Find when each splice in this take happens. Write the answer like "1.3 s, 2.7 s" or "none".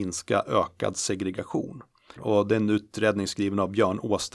2.2 s